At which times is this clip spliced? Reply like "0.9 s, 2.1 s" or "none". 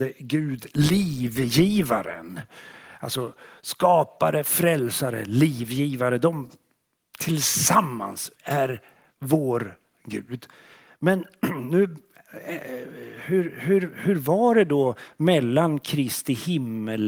8.4 s